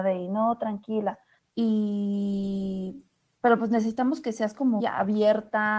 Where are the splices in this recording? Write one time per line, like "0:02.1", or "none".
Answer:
0:01.4
0:04.8